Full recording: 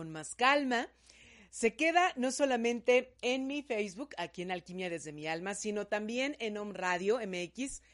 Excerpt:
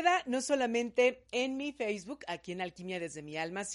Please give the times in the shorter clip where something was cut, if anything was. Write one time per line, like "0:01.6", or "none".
none

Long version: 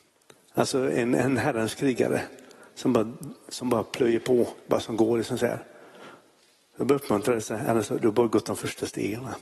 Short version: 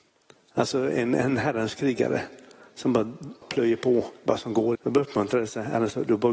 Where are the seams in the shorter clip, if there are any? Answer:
0:03.4
0:04.7

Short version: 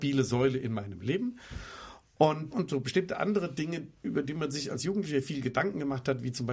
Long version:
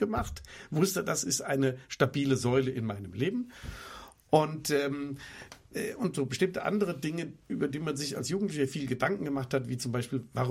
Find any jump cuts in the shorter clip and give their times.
0:02.5

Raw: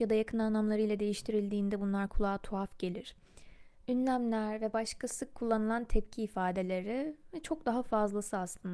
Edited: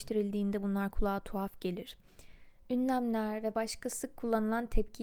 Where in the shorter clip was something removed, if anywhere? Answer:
none

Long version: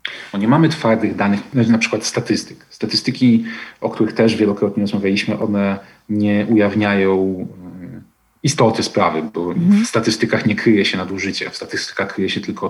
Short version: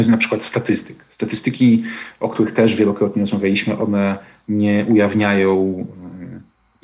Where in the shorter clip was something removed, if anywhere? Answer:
none

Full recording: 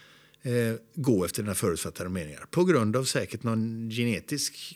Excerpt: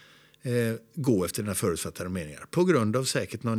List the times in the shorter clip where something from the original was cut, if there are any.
none

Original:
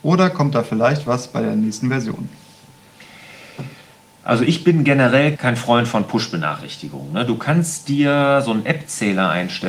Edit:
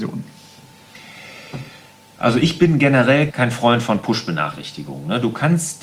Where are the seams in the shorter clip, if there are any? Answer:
none

